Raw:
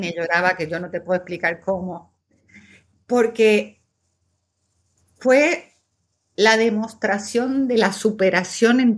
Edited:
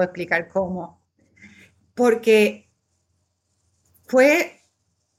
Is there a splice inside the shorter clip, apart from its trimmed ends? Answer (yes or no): no